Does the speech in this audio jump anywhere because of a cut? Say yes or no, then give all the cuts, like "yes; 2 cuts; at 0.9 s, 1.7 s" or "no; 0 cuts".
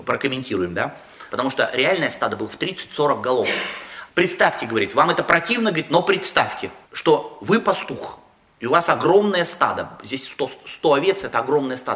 yes; 3 cuts; at 1.3 s, 4.1 s, 6.8 s